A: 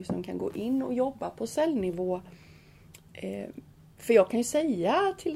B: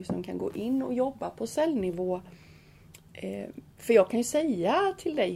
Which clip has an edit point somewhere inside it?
B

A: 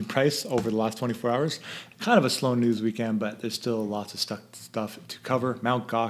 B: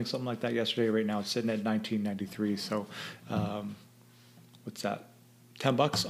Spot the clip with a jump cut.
A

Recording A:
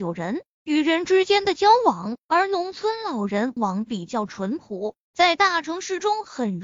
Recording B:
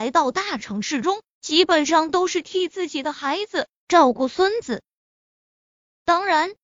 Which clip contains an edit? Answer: A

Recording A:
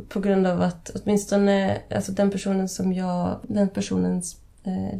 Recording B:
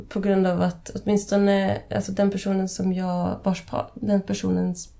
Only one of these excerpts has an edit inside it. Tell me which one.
A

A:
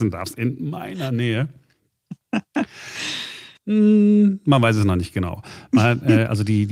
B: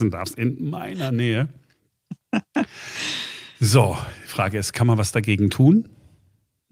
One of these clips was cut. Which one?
A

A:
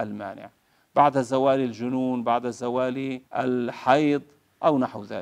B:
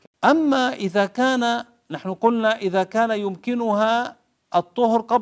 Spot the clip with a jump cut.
A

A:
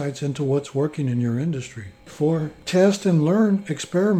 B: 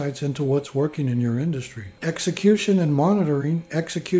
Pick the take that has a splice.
B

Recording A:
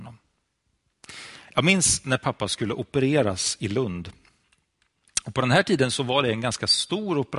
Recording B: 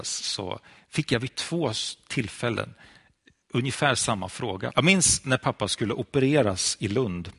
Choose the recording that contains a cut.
B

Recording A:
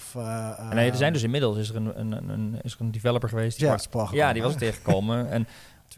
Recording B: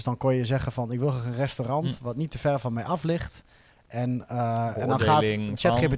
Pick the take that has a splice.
A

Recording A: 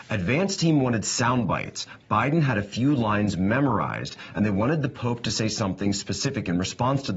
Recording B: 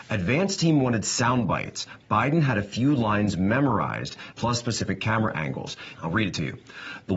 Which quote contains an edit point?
B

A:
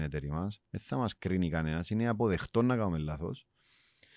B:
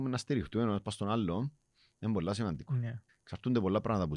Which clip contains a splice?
B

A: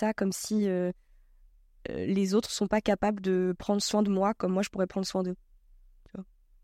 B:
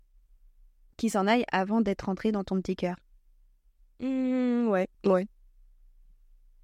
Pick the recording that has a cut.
B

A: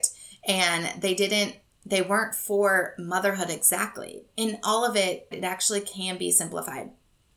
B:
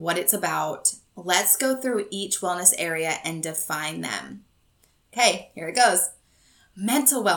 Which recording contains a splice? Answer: A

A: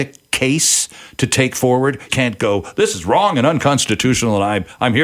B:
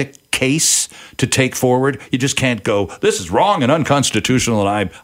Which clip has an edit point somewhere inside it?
A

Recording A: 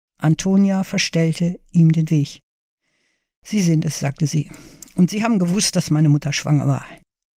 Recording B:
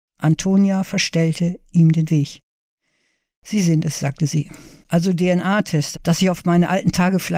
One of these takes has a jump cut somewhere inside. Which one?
B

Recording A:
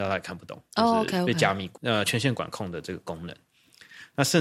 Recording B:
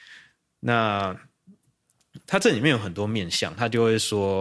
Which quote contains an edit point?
A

